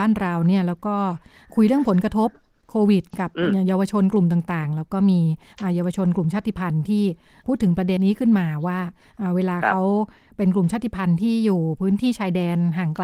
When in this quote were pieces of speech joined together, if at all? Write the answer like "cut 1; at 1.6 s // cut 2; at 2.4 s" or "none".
cut 1; at 8.0 s